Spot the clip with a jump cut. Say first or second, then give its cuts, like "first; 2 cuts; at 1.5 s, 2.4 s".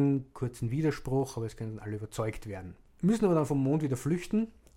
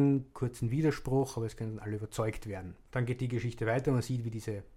first; 1 cut; at 2.9 s